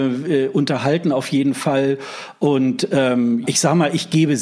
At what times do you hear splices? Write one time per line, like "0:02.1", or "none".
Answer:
0:03.4